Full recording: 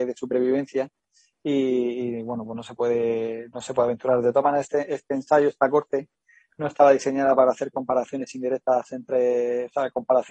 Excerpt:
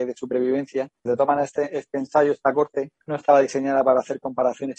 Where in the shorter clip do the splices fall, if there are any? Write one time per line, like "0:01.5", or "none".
0:01.1
0:03.0